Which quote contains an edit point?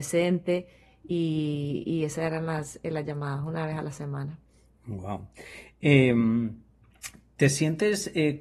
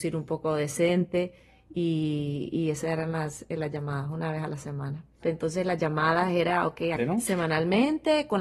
second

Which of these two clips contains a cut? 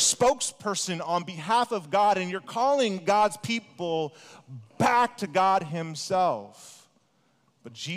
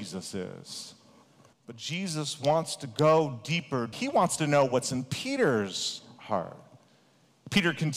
second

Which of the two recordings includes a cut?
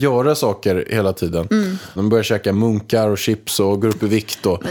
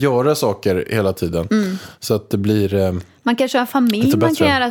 first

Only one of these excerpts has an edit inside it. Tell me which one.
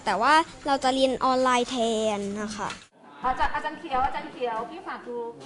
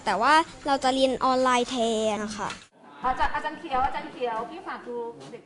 second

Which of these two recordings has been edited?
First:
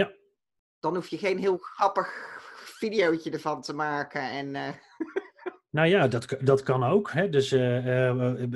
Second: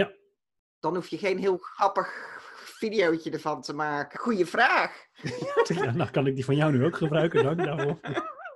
second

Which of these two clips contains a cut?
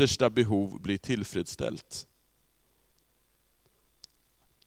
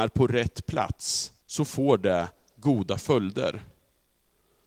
second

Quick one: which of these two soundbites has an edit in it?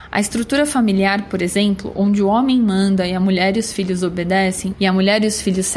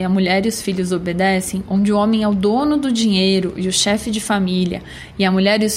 first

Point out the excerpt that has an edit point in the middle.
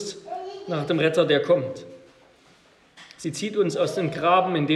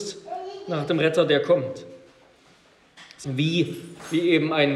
second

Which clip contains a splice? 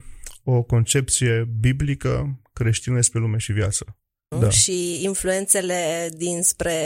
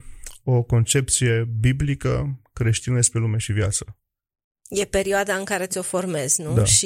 first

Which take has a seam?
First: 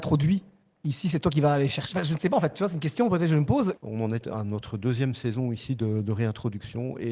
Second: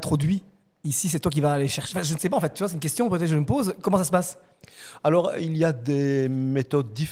first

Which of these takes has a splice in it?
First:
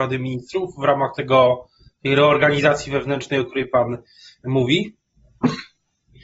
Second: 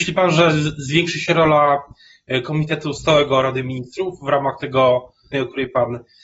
second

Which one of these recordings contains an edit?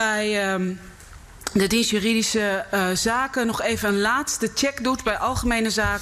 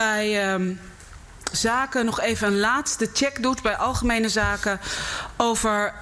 second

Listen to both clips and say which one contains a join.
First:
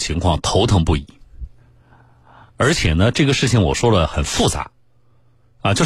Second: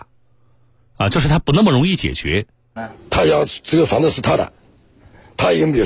second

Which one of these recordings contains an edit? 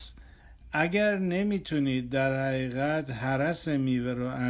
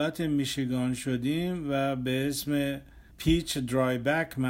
second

